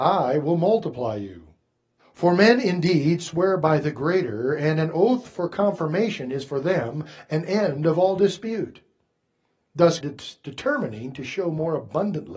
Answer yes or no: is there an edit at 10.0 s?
yes